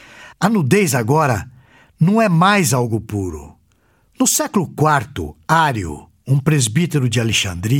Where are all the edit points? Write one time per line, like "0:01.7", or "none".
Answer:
0:04.1